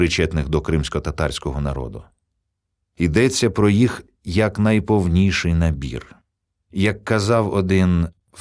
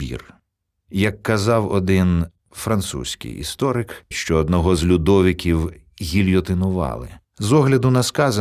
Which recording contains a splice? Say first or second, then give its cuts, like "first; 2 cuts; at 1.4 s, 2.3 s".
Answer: second; 2 cuts; at 4.1 s, 7.2 s